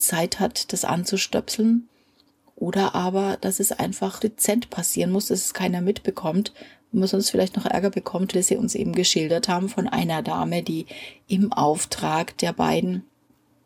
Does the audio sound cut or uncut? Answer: cut